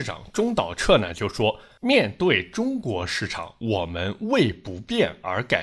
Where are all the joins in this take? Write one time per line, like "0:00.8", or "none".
none